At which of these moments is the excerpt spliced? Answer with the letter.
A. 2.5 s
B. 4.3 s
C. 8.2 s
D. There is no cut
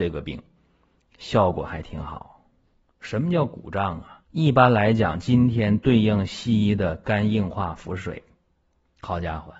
B